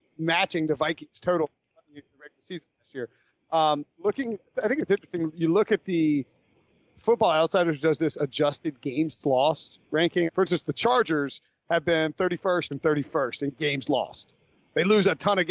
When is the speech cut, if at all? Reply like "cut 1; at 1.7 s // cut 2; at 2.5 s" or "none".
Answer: cut 1; at 10.3 s // cut 2; at 12.7 s